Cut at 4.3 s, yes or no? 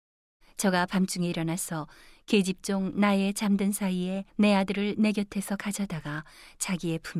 yes